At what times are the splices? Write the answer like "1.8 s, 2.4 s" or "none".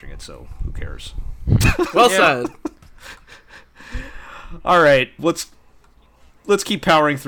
5.2 s